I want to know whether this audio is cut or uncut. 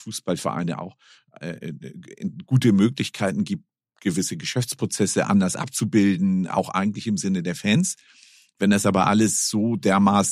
uncut